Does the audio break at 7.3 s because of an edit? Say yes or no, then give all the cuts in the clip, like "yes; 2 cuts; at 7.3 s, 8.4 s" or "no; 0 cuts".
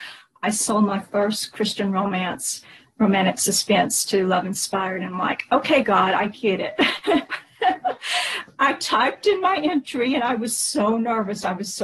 yes; 1 cut; at 7.3 s